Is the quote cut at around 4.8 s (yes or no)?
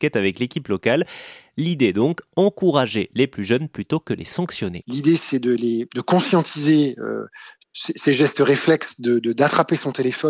yes